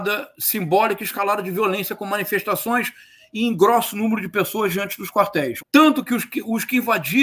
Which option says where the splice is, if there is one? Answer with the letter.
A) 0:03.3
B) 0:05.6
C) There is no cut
B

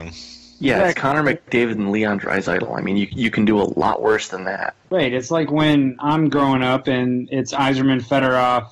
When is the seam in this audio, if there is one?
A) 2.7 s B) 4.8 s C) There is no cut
B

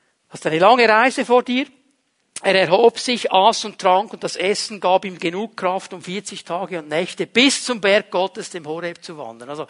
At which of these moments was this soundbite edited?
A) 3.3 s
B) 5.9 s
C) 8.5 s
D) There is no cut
D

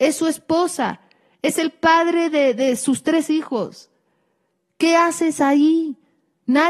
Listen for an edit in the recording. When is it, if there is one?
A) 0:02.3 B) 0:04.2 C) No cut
C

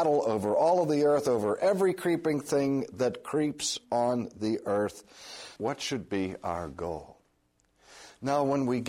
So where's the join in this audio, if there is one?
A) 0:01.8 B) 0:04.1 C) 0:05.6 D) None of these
C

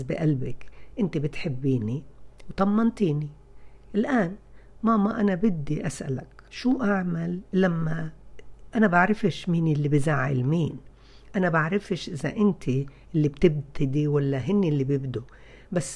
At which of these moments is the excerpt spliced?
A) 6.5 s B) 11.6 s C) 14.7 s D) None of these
A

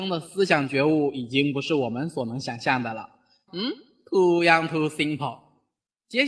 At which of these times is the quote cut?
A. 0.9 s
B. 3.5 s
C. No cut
B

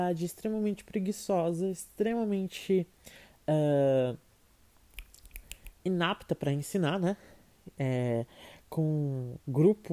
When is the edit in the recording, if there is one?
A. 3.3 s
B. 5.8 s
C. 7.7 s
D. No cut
D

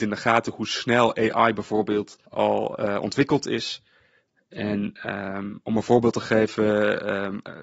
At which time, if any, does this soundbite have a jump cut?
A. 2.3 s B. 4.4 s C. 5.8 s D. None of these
A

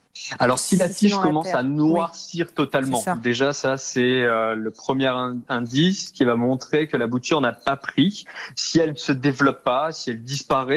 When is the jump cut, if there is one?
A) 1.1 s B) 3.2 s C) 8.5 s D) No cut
D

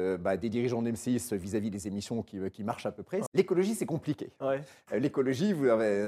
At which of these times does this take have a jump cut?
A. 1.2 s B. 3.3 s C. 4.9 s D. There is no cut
B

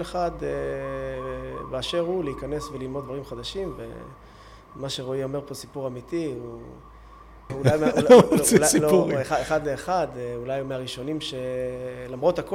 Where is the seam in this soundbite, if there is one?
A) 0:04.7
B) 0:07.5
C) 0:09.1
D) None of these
B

